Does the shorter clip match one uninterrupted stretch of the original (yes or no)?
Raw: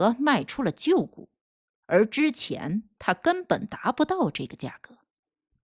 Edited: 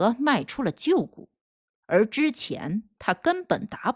yes